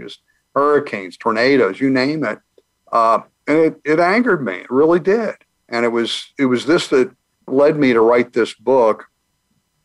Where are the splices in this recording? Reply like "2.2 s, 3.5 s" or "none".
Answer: 5.6 s, 7.5 s